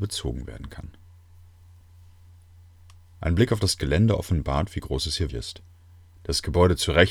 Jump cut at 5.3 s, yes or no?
yes